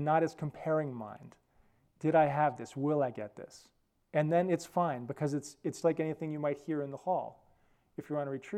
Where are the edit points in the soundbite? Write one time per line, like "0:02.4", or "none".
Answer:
0:05.8